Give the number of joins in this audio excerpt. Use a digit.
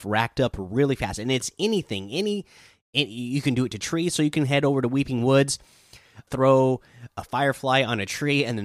1